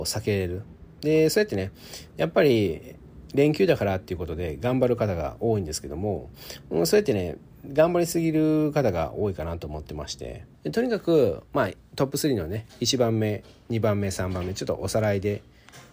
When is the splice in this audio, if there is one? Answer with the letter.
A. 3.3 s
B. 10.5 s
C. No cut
B